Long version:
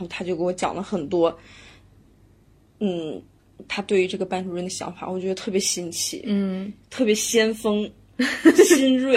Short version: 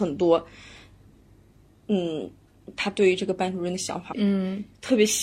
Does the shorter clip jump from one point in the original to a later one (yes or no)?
yes